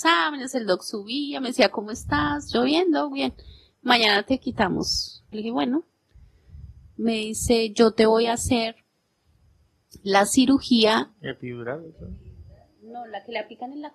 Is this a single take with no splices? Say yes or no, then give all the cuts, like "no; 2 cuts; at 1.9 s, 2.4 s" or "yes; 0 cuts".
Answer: no; 2 cuts; at 5.3 s, 11.1 s